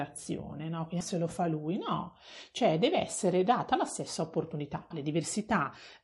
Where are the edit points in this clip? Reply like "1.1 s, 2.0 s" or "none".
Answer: 1.0 s, 4.9 s